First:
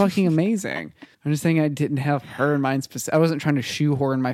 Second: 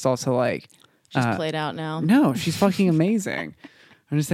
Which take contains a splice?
first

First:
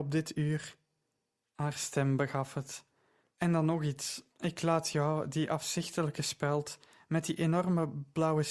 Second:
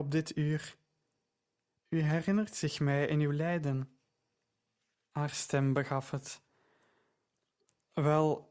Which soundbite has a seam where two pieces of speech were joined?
first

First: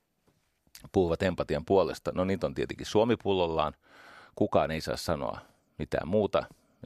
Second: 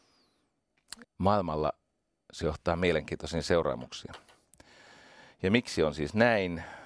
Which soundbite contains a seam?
second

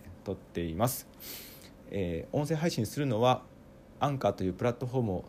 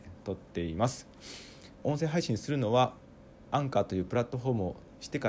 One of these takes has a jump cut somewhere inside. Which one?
second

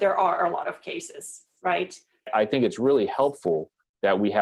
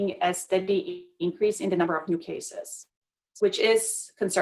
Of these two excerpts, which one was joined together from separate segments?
first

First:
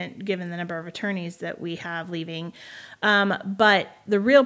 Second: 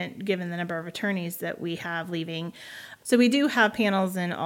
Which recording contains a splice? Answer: second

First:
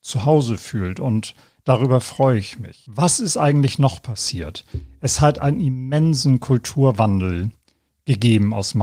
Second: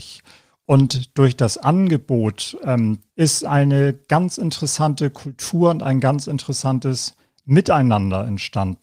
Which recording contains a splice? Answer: second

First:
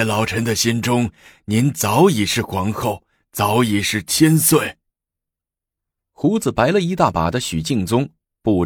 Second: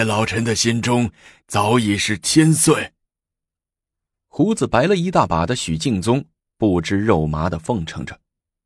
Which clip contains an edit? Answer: second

